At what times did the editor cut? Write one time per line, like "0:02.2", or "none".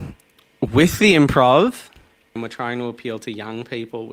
0:02.4

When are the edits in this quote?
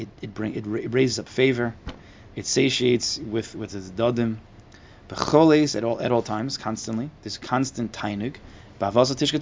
0:02.3

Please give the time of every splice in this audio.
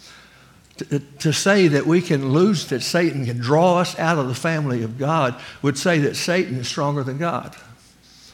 0:02.7

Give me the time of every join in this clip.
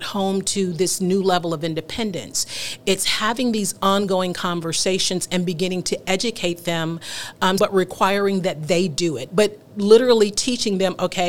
0:07.6
0:09.3

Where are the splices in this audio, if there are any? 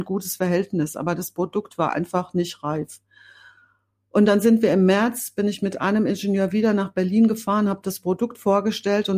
none

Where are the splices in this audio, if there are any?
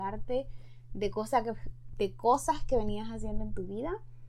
none

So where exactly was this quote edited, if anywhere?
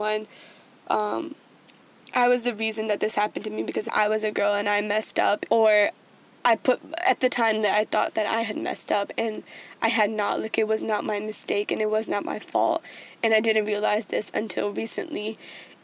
0:05.5

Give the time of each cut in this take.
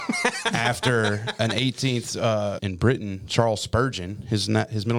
0:02.6

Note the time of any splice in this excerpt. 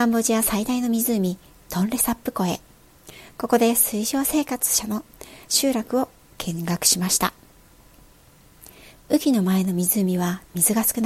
none

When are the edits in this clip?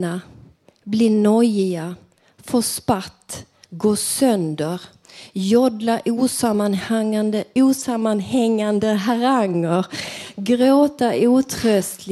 0:03.6
0:07.6

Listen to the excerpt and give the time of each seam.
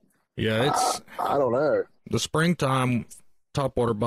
0:02.0

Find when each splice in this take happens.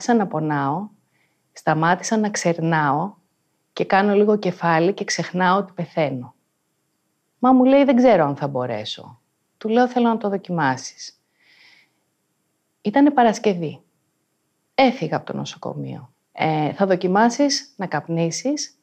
0:07.3
0:16.2

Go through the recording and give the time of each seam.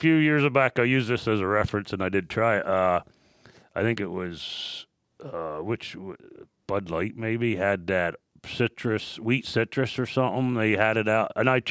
none

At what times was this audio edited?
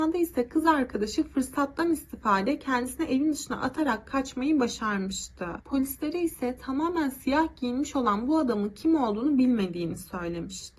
0:05.6

